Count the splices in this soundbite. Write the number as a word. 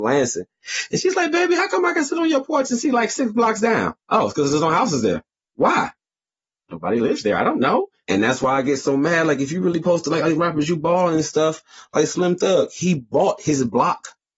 two